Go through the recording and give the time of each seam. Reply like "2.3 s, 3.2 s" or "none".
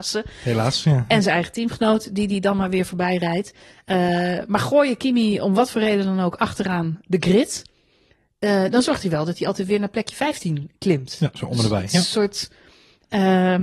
none